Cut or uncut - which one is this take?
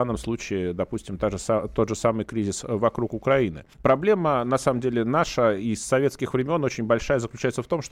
cut